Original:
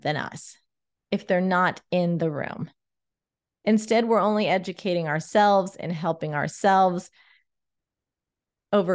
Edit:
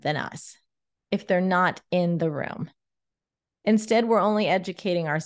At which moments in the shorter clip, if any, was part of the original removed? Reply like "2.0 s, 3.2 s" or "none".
none